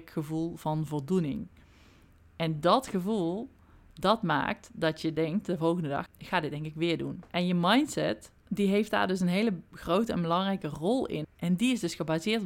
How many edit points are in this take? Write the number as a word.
three